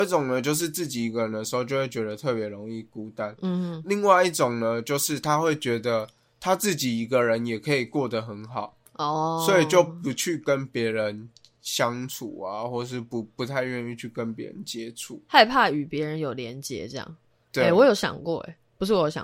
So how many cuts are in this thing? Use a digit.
0